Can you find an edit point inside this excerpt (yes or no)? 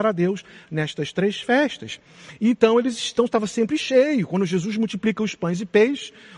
yes